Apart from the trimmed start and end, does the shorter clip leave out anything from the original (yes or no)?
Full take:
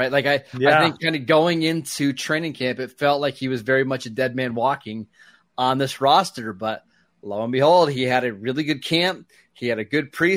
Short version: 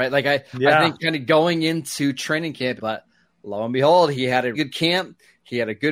yes